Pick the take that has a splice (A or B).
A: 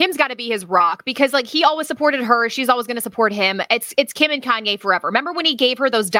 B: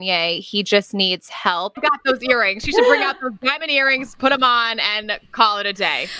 B